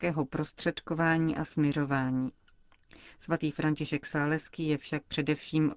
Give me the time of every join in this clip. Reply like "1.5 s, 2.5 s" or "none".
none